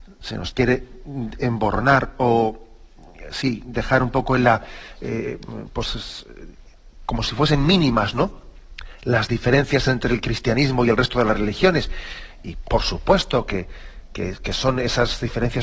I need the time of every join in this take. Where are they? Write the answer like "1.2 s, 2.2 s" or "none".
none